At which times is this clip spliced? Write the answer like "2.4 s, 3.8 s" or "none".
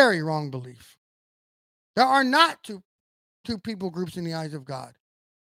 none